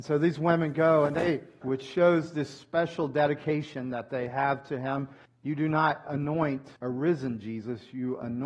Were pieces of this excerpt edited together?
yes; 3 cuts; at 1.6 s, 5.3 s, 6.8 s

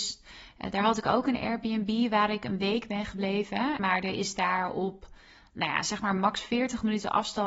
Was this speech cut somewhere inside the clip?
yes; 1 cut; at 3.8 s

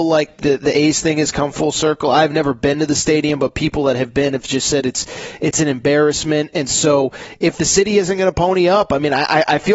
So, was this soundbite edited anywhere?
no; 0 cuts

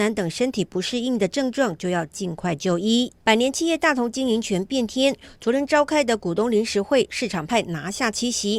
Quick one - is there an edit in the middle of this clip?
yes; 1 cut; at 3.2 s

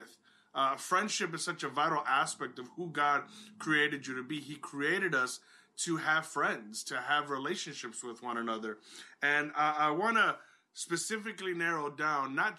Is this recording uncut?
yes; 0 cuts

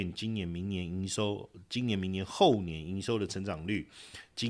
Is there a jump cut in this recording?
no; 0 cuts

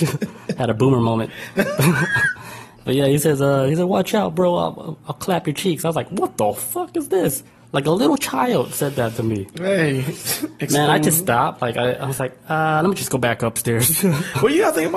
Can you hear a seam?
no; 0 cuts

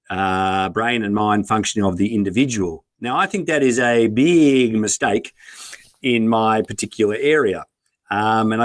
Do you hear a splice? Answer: no; 0 cuts

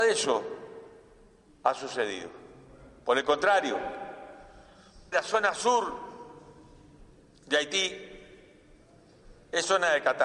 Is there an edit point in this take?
yes; 1 cut; at 5.1 s

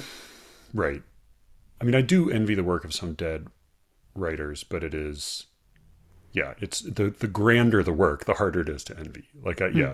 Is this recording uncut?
yes; 0 cuts

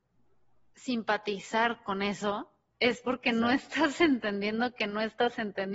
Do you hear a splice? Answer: no; 0 cuts

